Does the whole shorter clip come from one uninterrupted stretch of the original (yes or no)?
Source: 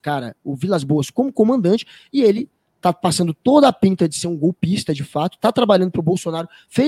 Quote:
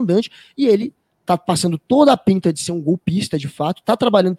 yes